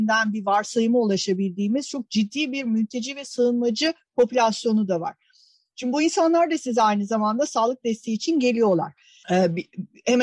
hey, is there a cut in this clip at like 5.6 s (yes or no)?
no